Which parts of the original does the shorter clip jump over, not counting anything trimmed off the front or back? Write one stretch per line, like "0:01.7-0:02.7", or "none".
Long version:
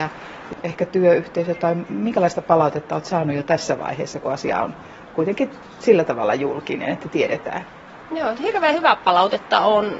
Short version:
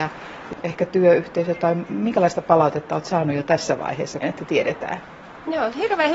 0:04.2-0:06.8